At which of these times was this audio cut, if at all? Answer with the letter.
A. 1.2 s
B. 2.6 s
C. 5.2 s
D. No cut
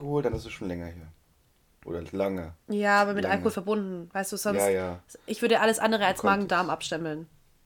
B